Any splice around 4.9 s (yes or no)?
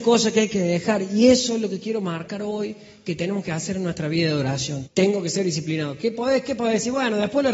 yes